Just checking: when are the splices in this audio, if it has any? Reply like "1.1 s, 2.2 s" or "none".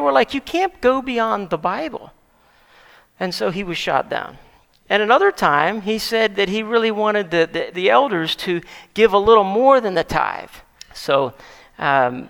7.7 s, 10.8 s